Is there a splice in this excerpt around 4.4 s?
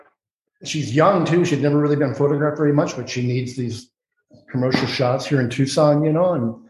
no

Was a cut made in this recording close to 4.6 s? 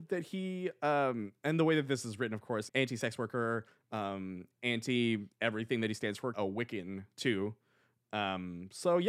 no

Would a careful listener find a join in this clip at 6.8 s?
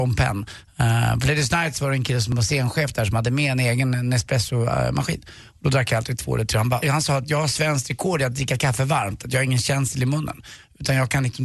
yes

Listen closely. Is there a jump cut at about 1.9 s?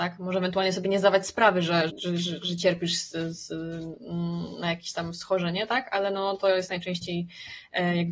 yes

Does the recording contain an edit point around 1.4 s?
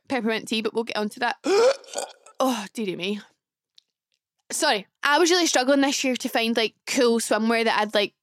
no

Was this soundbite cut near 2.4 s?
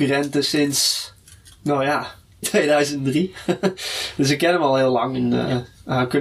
yes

